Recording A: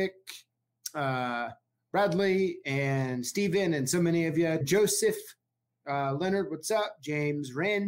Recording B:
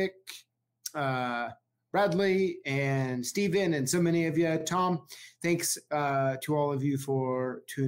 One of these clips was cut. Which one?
A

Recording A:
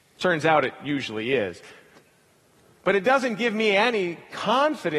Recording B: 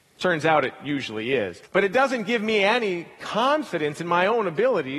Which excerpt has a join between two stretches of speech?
B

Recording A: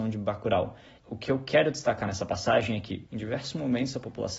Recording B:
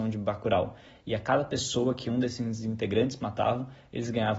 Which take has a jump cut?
A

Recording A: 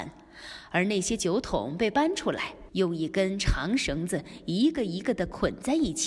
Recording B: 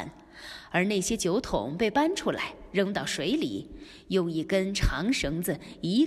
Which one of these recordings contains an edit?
A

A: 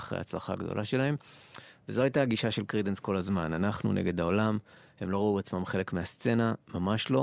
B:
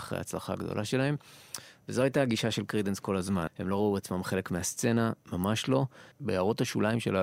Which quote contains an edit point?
B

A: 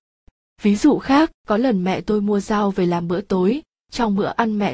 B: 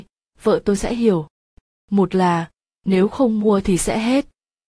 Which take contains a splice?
A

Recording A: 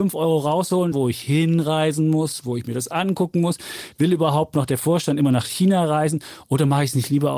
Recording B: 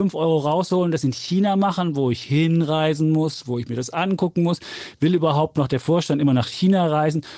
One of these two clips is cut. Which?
A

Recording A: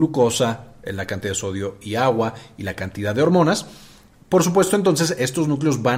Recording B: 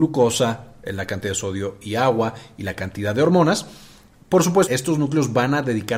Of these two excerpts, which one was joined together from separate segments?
B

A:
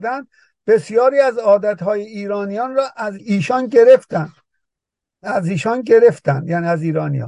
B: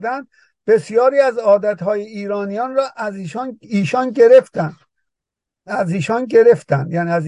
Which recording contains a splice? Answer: A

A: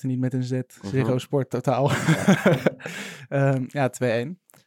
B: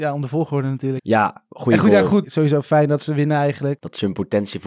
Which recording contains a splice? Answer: B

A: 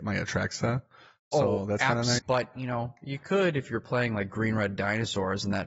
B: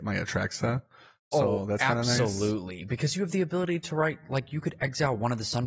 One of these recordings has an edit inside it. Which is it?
A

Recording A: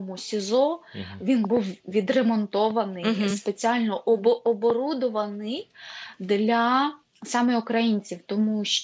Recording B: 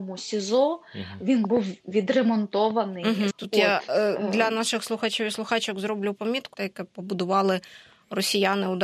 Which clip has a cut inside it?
B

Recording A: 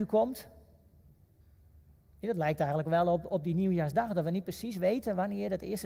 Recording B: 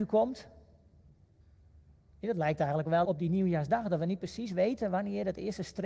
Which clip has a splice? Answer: B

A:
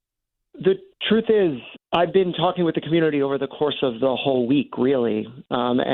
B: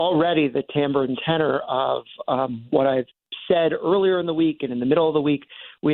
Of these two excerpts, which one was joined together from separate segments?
A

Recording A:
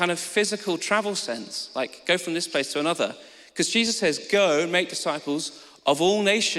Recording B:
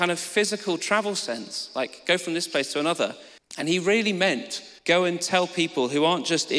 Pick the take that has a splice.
B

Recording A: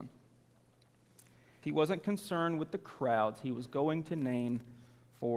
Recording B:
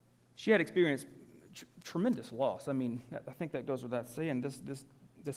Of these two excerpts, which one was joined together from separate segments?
A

